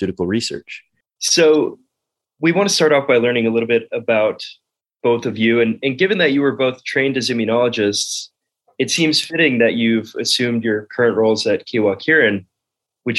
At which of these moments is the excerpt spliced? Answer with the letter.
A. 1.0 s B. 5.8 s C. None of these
A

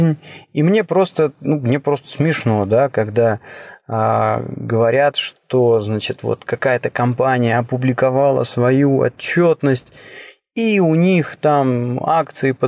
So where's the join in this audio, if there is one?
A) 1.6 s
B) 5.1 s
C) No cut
C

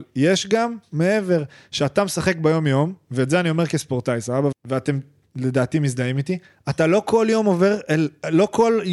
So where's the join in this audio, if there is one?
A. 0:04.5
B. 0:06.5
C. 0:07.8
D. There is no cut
A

